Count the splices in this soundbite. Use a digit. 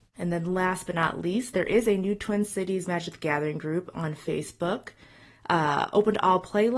0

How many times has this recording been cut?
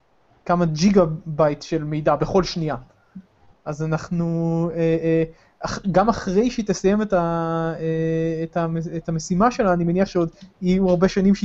1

